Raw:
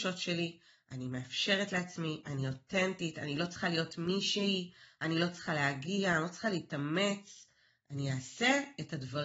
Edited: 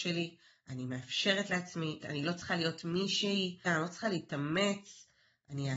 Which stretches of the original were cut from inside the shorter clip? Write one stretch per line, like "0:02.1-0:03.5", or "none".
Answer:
0:02.2-0:03.1
0:04.8-0:06.1